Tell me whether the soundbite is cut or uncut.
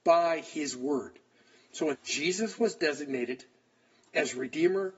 cut